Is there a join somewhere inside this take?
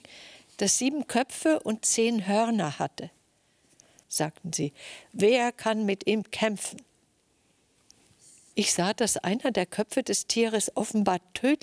yes; 2 cuts; at 4.0 s, 8.5 s

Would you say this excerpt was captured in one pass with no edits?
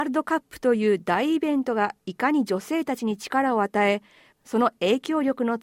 no; 1 cut; at 4.3 s

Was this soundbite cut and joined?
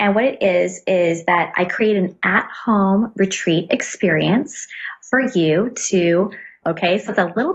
yes; 1 cut; at 6.6 s

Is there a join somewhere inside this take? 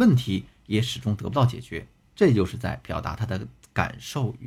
yes; 1 cut; at 2.0 s

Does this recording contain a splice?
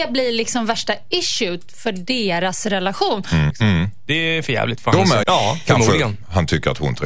yes; 2 cuts; at 3.5 s, 5.2 s

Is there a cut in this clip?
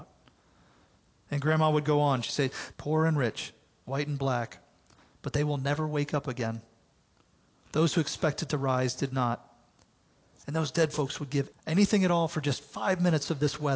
yes; 2 cuts; at 2.7 s, 11.5 s

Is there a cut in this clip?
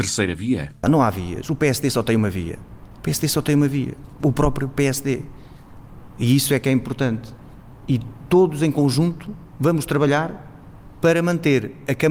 no; 0 cuts

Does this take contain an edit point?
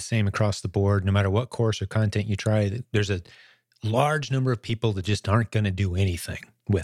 no; 0 cuts

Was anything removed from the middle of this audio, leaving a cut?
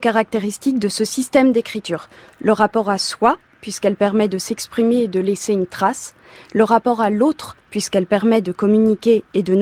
yes; 1 cut; at 2.3 s

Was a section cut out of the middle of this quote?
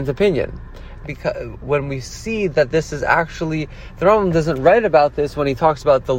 yes; 1 cut; at 1.0 s

